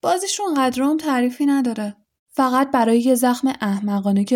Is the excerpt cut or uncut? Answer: cut